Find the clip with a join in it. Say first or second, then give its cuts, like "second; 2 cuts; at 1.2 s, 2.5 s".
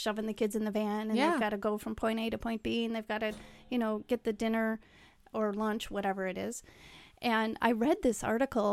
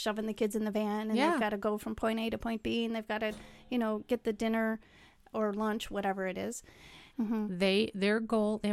second; 1 cut; at 7.1 s